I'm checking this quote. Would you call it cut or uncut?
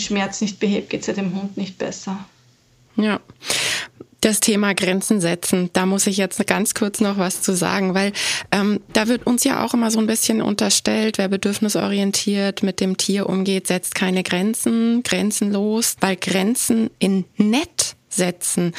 cut